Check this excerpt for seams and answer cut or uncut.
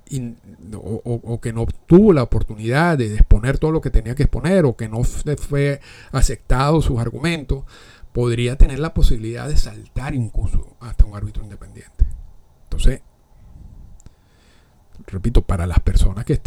cut